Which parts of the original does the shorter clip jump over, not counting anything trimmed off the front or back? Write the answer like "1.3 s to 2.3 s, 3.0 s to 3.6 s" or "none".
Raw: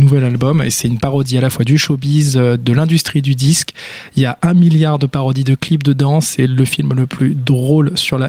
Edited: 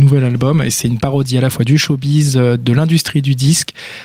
none